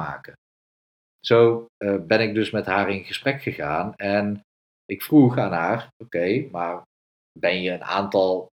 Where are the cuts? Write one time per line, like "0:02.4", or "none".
none